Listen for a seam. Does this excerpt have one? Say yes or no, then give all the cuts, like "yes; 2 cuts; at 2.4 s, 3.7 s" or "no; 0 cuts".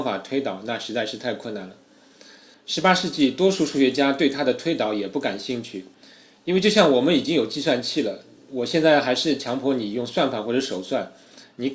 no; 0 cuts